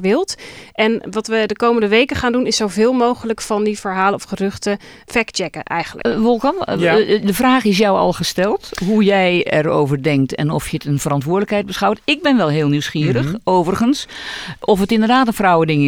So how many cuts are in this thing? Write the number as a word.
one